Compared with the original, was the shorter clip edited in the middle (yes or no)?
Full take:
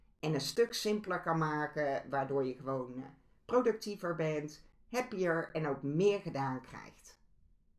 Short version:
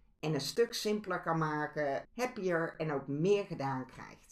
yes